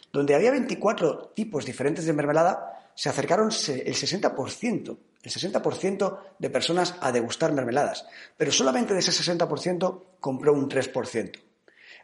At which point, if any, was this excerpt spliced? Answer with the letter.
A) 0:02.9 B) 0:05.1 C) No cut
C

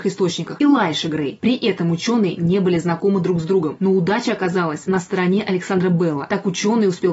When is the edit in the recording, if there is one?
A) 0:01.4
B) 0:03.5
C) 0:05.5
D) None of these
A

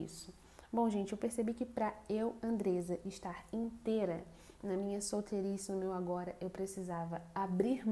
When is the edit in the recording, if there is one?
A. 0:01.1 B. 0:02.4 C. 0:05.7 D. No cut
D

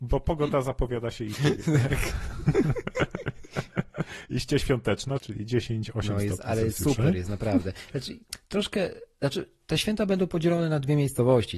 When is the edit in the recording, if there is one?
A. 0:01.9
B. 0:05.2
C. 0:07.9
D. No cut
B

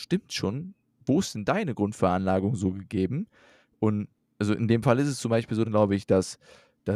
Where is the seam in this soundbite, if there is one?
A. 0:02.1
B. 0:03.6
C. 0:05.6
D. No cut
C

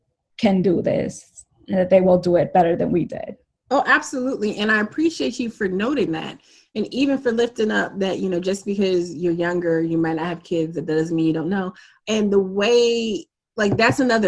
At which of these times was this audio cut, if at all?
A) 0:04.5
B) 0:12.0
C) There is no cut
B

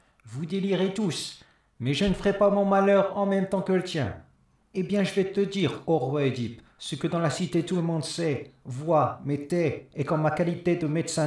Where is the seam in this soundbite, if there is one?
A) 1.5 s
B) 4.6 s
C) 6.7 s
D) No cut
B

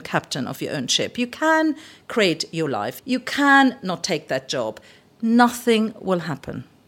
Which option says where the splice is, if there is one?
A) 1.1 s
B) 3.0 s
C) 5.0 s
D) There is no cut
B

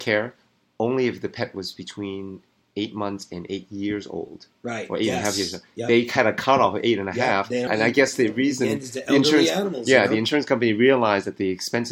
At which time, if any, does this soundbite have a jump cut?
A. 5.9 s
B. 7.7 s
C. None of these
B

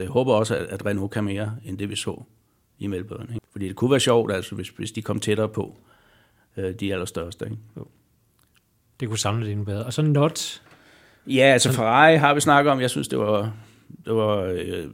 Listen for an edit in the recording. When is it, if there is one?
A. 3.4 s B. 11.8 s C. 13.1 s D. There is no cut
A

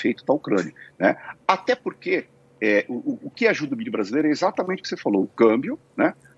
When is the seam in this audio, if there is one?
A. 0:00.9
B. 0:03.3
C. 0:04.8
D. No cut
A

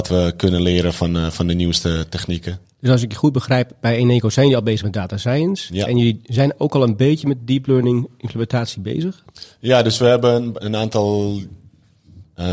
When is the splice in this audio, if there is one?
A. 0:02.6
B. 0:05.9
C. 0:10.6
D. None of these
C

